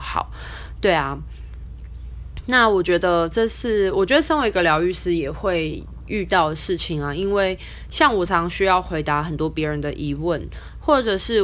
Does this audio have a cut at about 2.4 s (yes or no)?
no